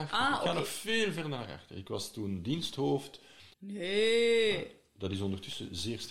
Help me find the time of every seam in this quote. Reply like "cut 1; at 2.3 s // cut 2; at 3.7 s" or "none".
cut 1; at 3.5 s